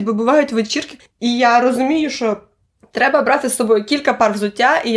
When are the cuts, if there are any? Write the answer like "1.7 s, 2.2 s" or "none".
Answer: 1.0 s